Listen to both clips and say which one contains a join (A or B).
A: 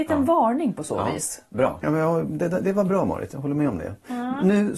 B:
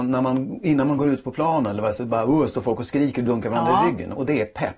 A